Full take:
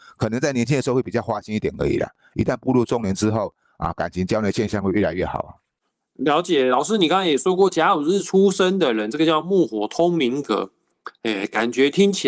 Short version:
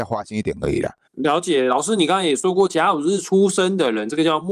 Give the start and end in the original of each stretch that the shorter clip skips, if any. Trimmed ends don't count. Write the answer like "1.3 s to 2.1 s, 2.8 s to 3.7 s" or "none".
2.2 s to 6.1 s